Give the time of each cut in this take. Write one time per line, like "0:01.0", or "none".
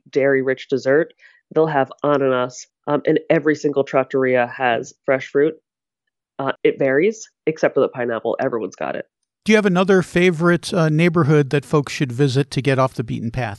0:02.7
0:06.6

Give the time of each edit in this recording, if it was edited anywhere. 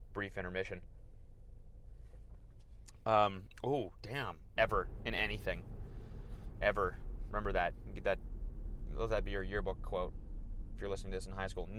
0:04.6

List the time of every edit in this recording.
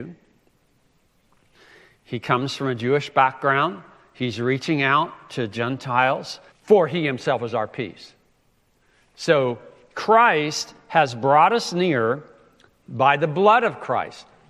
0:06.5

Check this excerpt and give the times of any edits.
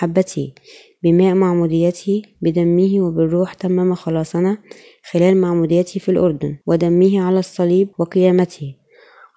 0:06.6
0:07.9

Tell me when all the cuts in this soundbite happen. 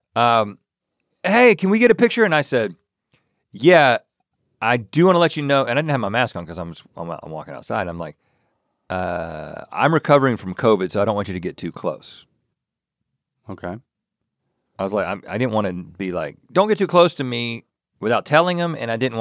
none

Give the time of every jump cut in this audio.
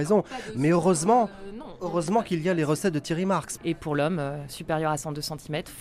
0:03.6

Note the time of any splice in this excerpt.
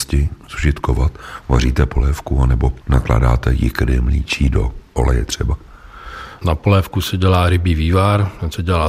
none

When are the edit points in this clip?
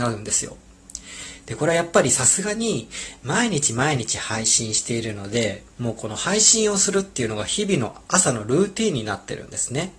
0:05.7

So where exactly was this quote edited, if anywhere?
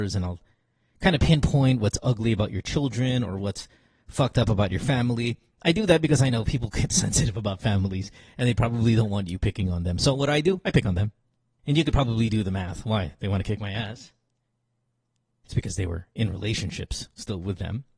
0:11.6

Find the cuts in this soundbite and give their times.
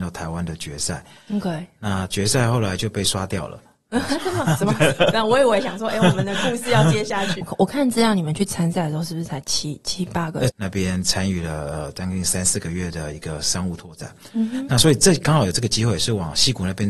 0:07.4
0:10.5

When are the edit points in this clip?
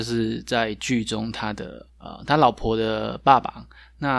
0:01.9

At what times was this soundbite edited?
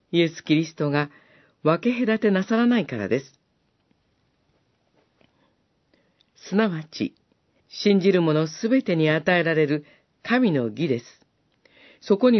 0:07.6

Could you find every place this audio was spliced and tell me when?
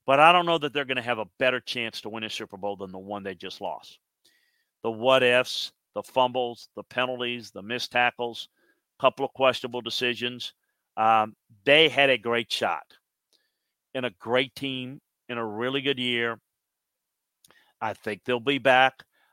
none

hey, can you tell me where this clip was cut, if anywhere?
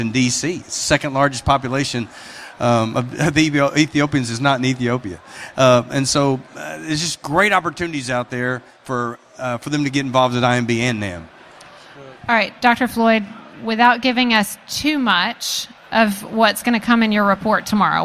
none

